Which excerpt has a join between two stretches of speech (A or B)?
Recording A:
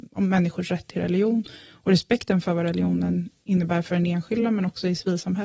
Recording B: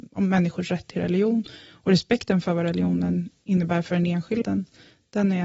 B